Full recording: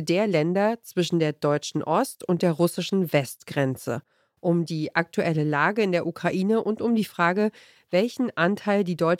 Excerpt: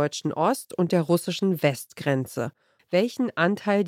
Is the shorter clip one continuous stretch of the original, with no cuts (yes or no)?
no